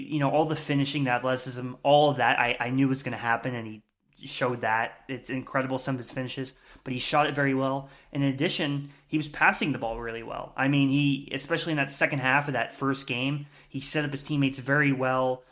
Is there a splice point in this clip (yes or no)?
no